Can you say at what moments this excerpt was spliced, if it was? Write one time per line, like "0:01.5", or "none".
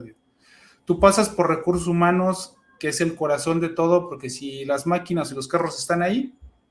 none

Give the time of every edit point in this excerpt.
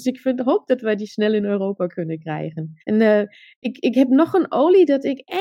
0:02.8

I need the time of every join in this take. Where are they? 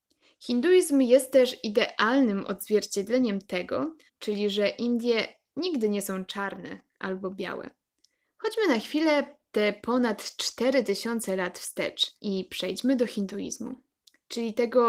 0:04.1
0:08.2
0:12.2

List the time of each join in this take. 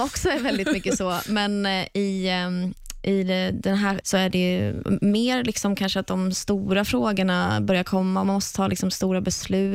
0:04.0

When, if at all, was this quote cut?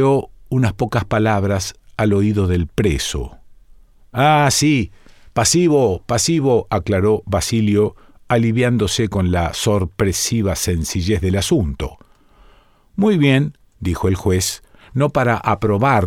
none

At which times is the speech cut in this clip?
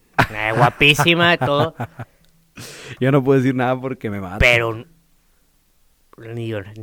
none

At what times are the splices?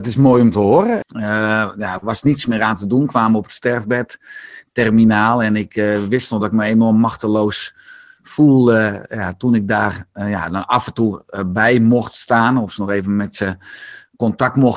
0:01.0

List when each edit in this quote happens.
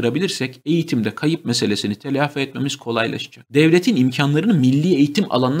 none

